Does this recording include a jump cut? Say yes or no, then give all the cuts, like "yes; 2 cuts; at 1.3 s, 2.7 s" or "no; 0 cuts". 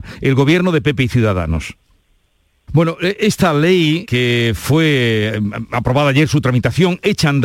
yes; 2 cuts; at 2.7 s, 4.0 s